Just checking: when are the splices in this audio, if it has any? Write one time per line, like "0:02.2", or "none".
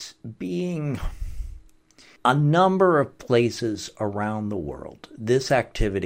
0:02.2